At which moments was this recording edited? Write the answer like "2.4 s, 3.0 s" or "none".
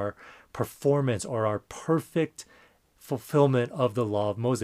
none